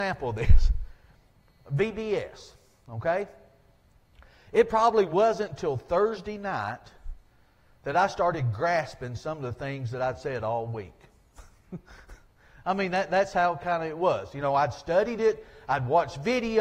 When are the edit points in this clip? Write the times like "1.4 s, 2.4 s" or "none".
none